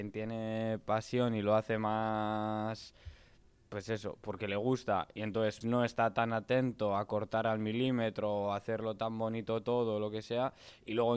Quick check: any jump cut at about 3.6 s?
no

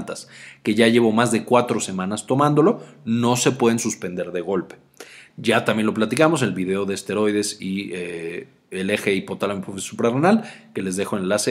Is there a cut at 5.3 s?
yes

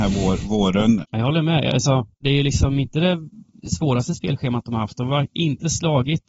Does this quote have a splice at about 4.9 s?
no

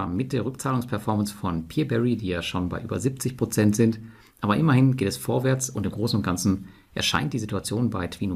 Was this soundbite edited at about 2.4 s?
no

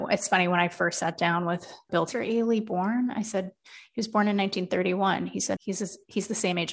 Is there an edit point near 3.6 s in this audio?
no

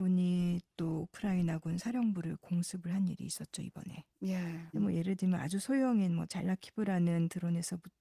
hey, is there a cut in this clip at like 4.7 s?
yes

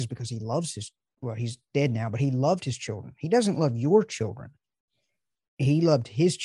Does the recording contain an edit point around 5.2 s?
no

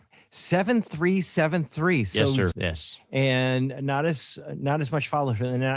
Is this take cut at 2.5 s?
yes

